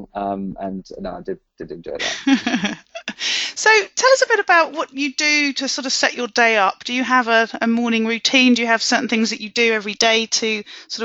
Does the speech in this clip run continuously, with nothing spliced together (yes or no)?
yes